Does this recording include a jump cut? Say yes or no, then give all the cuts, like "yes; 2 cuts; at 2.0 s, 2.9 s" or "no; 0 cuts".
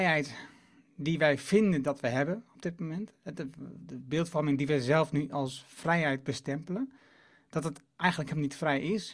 no; 0 cuts